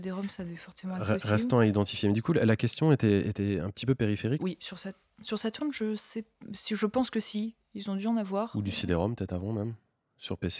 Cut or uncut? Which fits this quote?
cut